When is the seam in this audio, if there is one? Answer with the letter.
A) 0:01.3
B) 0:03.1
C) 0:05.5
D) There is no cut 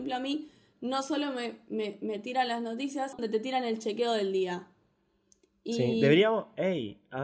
B